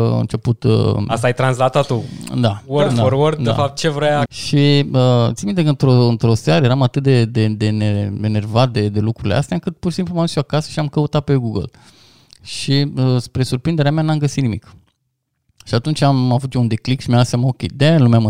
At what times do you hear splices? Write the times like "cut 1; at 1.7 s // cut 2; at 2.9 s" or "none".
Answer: cut 1; at 4.3 s